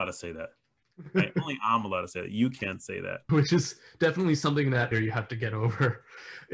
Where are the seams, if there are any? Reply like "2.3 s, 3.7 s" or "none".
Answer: 3.3 s, 4.9 s